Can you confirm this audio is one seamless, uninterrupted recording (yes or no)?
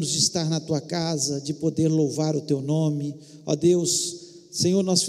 yes